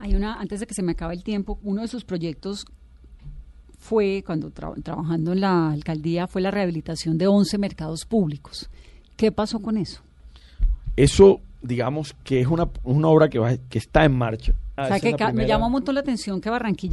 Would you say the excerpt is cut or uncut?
cut